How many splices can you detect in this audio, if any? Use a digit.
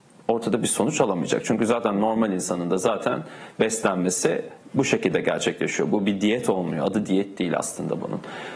0